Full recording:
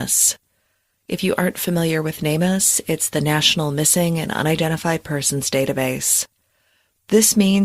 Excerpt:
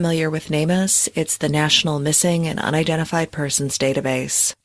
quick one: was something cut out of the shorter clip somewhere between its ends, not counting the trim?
no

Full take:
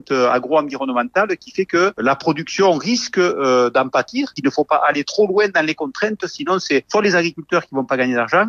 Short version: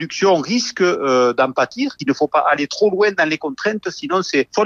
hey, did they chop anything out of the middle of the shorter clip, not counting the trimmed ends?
no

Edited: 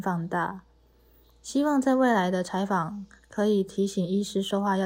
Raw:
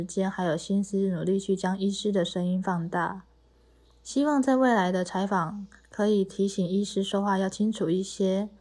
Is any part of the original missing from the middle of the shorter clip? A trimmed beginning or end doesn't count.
no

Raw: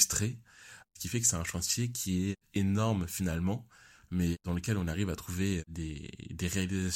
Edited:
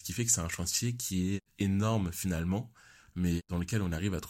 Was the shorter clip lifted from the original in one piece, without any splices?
yes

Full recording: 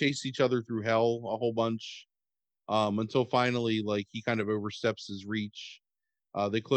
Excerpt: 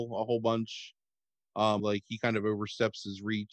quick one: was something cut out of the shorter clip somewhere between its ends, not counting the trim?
yes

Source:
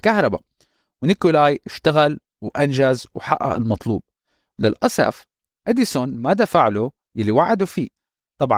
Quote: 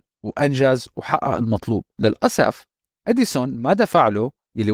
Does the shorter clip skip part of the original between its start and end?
yes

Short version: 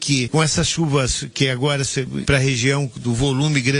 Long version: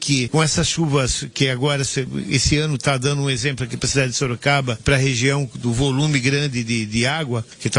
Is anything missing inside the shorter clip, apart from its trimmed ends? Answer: yes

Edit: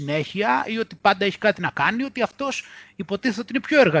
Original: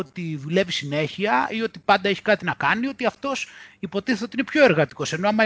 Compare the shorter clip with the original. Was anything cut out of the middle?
no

